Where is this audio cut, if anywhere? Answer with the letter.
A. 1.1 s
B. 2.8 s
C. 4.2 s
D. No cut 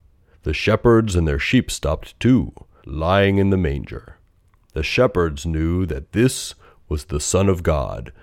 B